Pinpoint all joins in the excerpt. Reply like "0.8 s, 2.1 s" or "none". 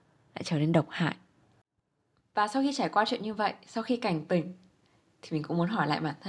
none